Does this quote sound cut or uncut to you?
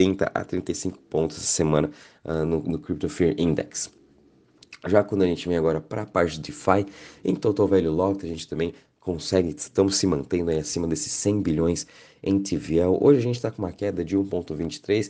uncut